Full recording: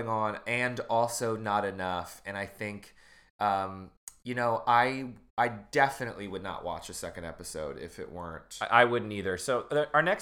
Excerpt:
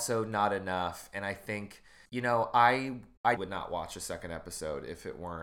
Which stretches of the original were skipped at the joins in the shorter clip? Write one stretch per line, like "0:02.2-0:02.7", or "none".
0:03.2-0:04.2
0:05.5-0:06.3